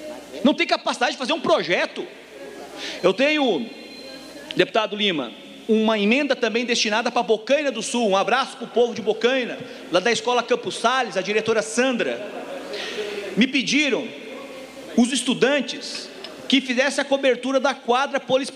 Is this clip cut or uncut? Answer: uncut